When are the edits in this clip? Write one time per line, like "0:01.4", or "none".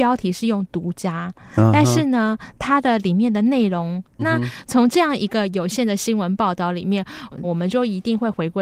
0:04.2
0:07.4

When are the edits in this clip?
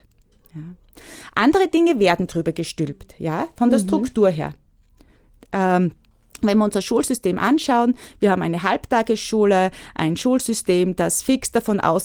none

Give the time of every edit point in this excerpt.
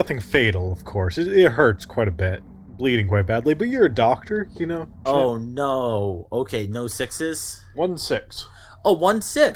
0:05.1

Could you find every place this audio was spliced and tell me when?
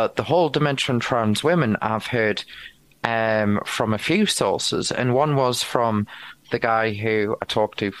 none

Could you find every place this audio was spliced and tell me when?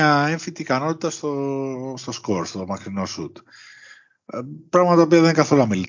none

